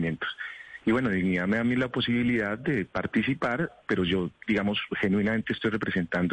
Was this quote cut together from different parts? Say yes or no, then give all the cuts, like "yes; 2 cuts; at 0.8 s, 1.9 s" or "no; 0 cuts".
no; 0 cuts